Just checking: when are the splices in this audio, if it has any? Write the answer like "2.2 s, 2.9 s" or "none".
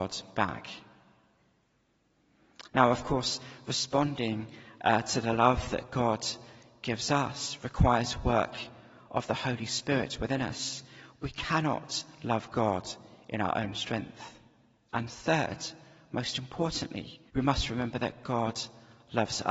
14.9 s, 17.3 s

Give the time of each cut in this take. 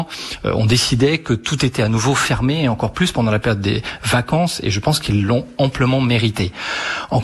none

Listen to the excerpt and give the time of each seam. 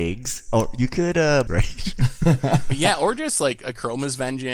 1.5 s

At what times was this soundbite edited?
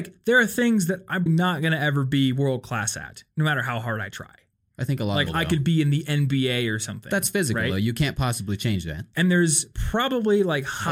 1.3 s, 5.3 s

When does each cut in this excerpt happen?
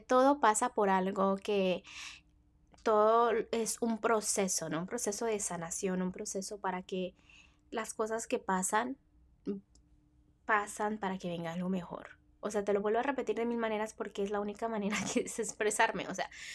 none

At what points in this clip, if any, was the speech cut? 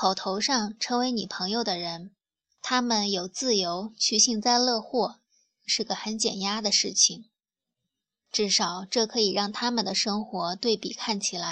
5.6 s

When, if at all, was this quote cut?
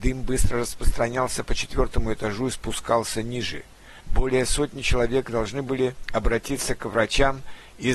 4.0 s

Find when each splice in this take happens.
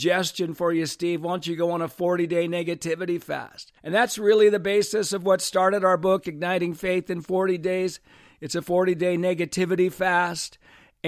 3.8 s

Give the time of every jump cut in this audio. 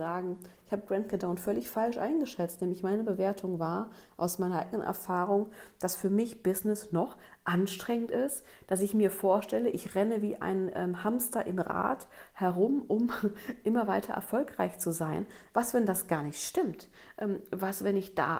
none

